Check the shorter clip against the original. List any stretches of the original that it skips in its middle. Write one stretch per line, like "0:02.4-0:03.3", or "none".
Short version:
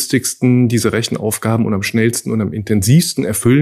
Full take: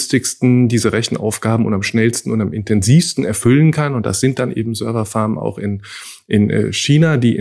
none